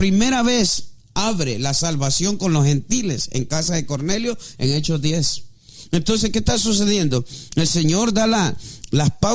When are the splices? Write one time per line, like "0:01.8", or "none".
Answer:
none